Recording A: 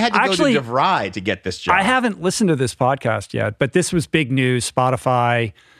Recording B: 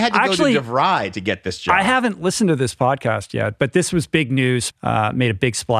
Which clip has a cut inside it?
B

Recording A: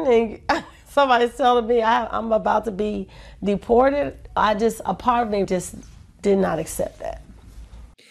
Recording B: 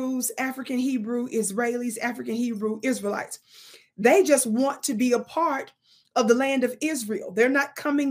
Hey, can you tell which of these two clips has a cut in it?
A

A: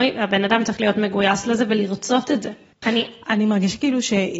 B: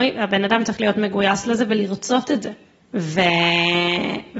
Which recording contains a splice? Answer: A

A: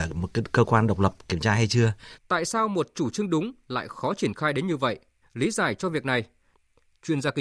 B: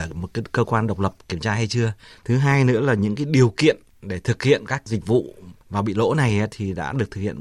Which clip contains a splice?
A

